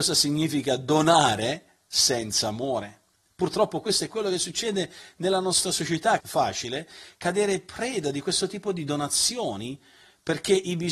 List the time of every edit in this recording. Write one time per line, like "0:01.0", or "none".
0:06.2